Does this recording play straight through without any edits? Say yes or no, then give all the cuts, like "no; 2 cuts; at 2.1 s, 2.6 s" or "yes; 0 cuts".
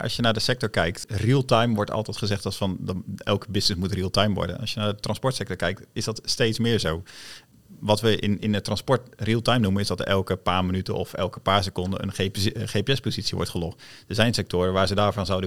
no; 2 cuts; at 8.4 s, 12.0 s